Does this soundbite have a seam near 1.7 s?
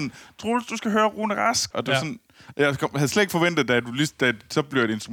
yes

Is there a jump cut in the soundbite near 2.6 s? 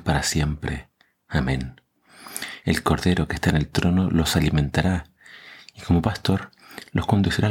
yes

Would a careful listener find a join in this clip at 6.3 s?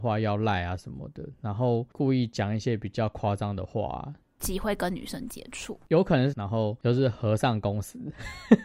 yes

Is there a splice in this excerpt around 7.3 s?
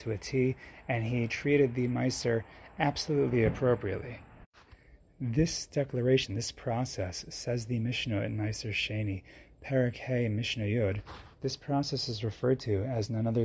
no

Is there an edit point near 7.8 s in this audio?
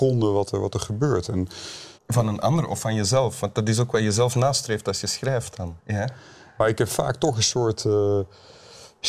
no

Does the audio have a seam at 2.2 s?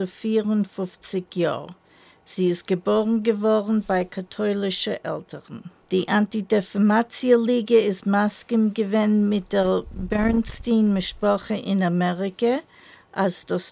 no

